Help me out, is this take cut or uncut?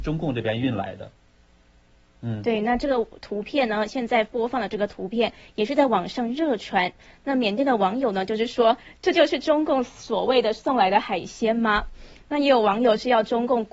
uncut